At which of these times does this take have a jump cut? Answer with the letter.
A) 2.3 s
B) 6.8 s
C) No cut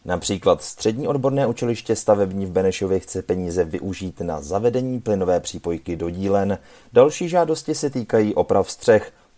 B